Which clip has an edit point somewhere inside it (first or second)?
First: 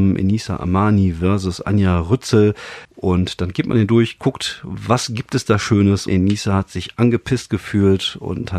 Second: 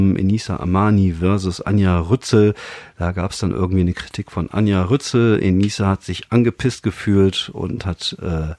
first